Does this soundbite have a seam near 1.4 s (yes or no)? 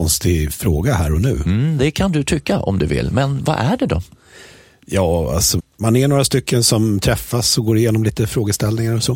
no